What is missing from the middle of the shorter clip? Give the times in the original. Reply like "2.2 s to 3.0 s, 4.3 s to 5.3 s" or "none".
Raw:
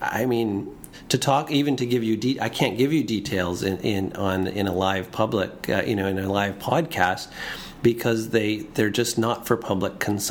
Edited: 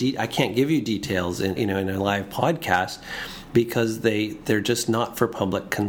3.8 s to 5.8 s